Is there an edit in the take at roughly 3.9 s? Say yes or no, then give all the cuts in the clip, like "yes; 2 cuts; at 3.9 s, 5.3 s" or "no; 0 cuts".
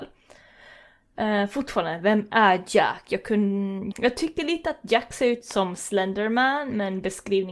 yes; 1 cut; at 3.9 s